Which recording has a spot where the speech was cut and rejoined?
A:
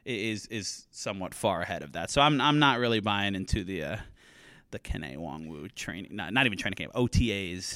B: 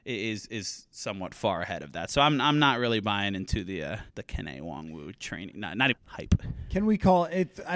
B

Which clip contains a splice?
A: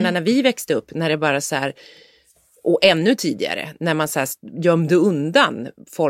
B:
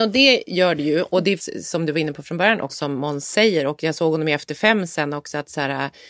B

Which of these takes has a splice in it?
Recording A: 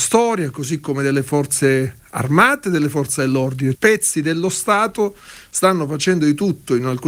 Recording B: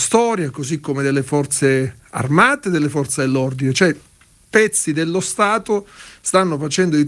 A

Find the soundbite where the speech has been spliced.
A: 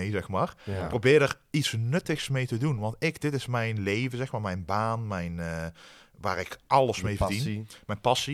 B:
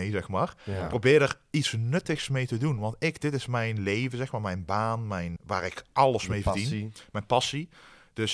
B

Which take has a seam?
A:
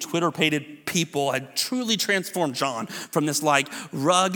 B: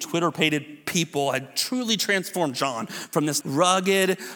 B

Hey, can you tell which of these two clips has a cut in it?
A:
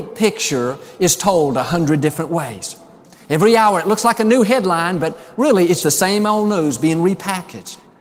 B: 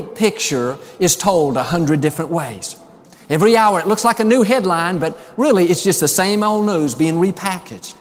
A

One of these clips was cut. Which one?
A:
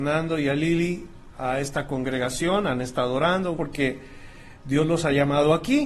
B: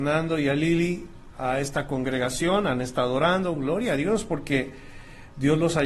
A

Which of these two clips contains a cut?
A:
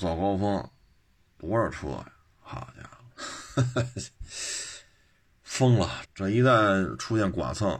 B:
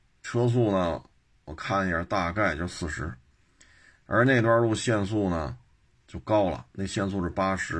A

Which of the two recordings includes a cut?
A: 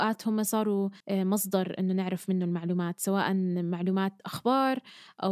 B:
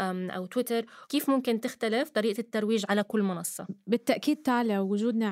A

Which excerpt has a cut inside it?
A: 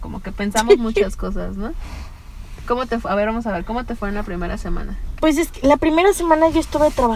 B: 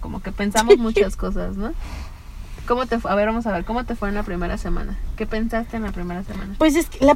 A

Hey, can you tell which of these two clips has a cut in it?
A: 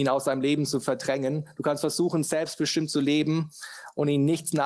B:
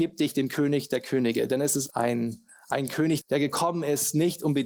B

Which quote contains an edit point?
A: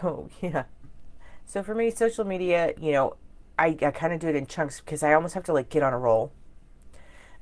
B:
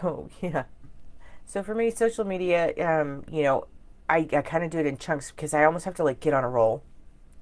A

